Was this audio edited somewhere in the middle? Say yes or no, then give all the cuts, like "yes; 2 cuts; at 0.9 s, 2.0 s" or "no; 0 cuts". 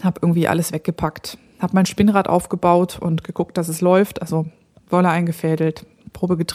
no; 0 cuts